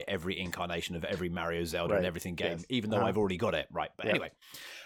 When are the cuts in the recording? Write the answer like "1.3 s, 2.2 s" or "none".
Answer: none